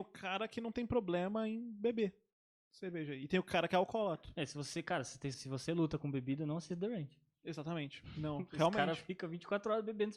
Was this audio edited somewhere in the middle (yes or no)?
yes